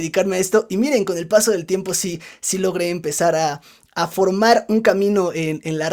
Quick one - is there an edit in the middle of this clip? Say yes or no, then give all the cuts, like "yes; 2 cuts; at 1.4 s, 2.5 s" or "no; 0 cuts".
no; 0 cuts